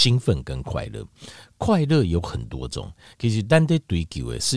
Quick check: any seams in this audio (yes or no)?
no